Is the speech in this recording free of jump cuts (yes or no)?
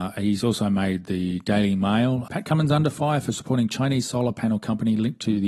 no